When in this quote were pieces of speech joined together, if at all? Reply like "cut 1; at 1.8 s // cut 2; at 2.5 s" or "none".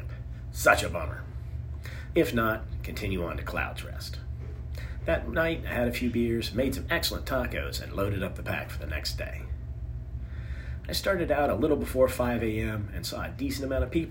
cut 1; at 2.1 s